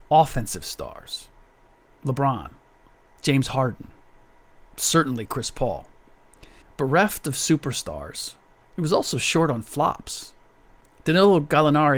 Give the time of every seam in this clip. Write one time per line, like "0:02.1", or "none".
0:06.6

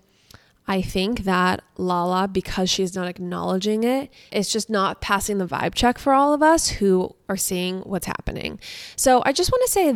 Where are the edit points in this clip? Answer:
none

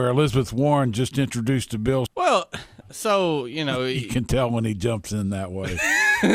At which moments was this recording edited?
0:02.1

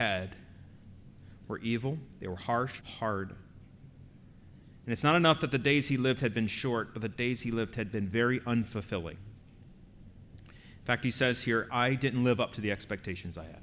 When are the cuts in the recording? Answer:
0:02.8

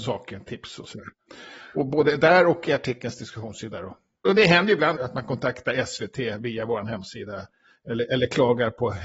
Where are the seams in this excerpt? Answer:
0:05.0

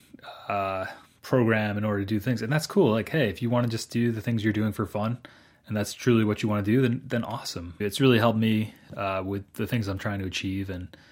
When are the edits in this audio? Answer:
0:07.8

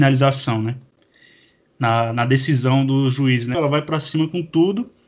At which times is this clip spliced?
0:03.5

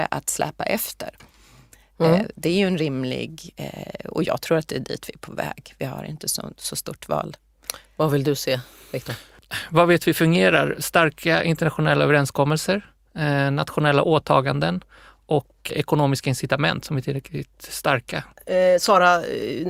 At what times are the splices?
0:15.7
0:18.3

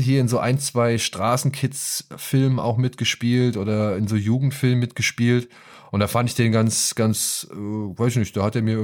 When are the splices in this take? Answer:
none

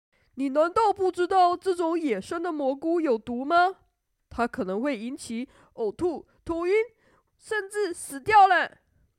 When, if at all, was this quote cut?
0:07.3

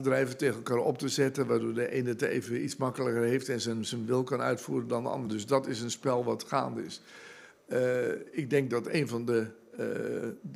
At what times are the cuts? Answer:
none

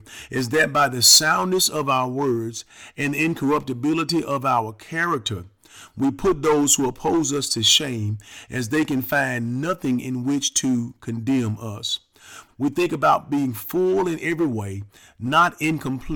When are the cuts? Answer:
0:12.5

